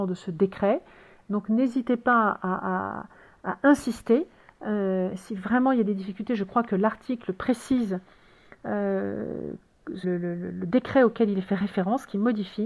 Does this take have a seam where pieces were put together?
yes; 1 cut; at 10.0 s

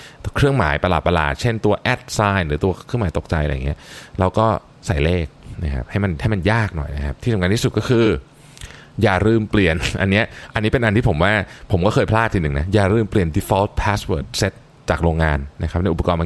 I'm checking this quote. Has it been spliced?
no; 0 cuts

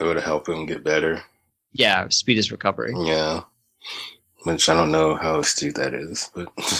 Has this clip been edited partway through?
no; 0 cuts

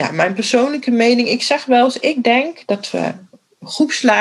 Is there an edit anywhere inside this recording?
no; 0 cuts

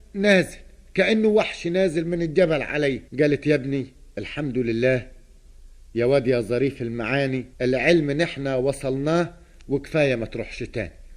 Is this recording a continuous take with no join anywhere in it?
no; 2 cuts; at 3.1 s, 7.5 s

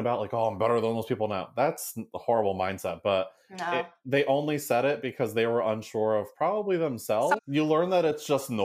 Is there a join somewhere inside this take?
yes; 1 cut; at 7.4 s

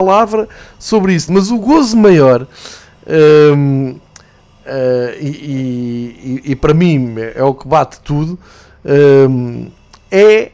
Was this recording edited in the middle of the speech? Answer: yes; 1 cut; at 1.3 s

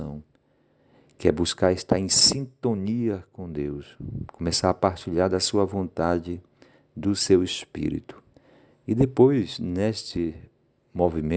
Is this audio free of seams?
yes; 0 cuts

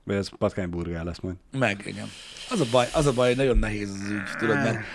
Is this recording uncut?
yes; 0 cuts

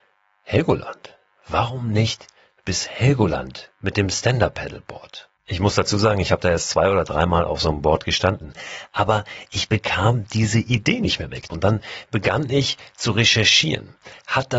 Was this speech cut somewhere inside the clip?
yes; 1 cut; at 11.5 s

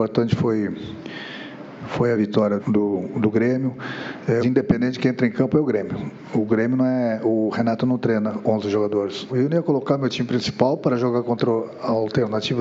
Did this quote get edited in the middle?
yes; 3 cuts; at 2.6 s, 4.4 s, 9.3 s

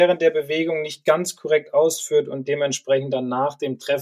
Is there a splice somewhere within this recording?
no; 0 cuts

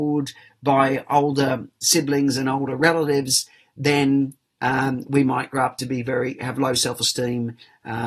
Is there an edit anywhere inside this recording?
no; 0 cuts

